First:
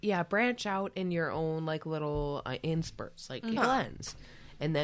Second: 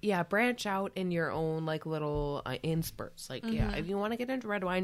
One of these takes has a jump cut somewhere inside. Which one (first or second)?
first